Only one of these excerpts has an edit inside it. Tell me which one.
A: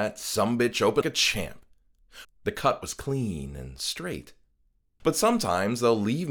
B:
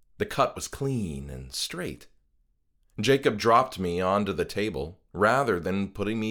A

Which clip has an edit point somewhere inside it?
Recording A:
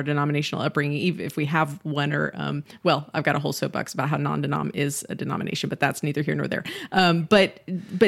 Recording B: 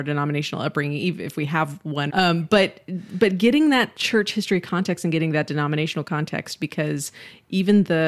B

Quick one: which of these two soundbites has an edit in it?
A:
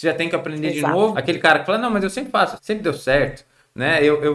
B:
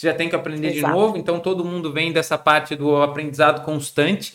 A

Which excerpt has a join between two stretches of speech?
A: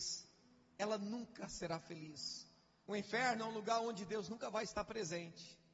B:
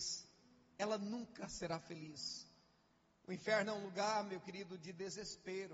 A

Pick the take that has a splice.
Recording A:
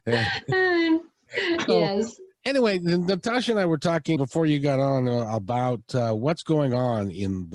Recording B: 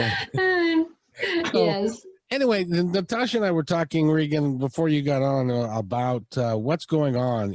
A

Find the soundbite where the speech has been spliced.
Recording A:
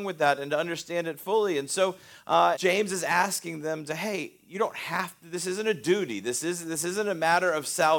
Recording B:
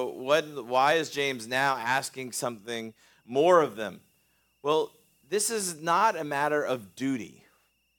A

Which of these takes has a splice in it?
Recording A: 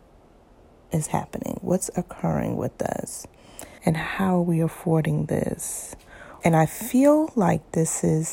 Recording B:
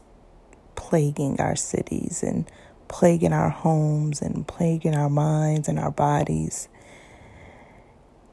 A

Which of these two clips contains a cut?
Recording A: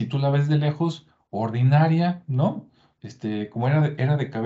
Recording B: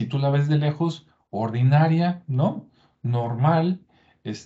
A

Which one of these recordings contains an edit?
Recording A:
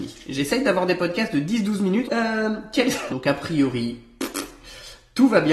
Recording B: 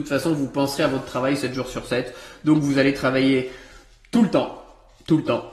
A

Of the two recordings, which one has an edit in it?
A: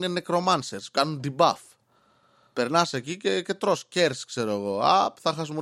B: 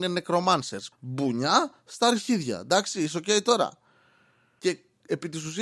B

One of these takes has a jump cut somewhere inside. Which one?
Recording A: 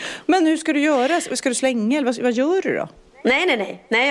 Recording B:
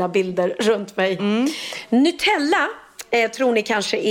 B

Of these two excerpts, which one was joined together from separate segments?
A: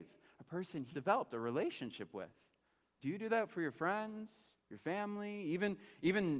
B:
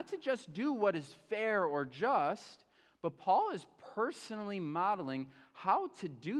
A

